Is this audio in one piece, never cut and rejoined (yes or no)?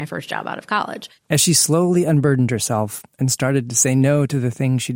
yes